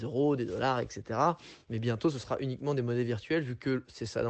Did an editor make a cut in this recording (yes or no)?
no